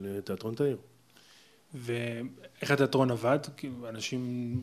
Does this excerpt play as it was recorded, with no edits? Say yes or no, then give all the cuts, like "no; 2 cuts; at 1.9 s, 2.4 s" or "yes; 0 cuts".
yes; 0 cuts